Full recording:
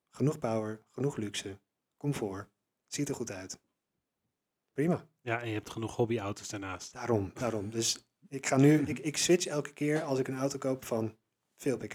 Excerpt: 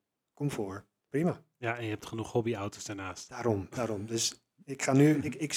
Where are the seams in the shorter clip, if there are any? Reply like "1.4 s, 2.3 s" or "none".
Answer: 1.0 s